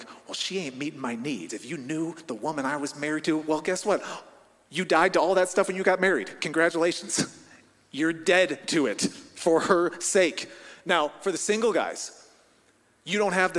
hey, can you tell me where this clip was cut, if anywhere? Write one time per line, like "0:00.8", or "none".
none